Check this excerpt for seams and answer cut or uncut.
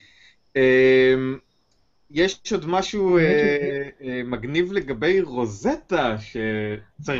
uncut